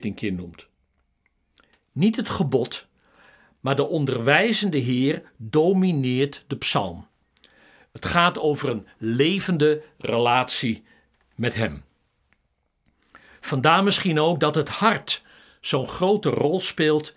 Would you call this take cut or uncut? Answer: uncut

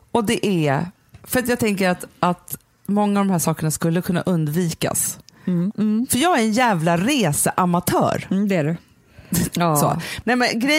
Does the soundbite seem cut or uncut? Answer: cut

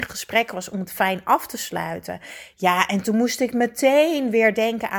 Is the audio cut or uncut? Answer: uncut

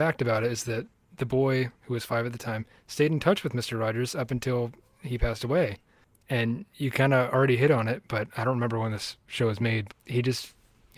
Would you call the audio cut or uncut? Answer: cut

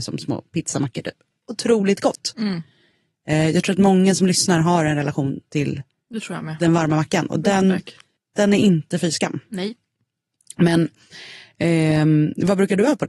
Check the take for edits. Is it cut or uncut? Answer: cut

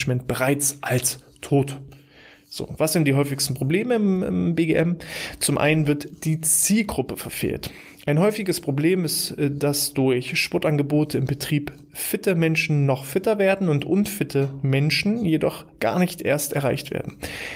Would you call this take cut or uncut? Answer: uncut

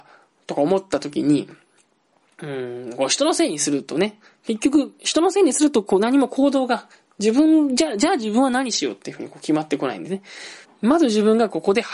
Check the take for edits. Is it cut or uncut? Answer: cut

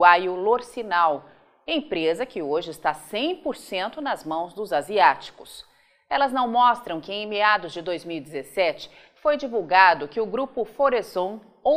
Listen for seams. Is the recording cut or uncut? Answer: uncut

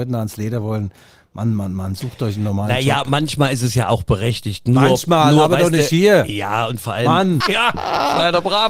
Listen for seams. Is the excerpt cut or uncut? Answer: cut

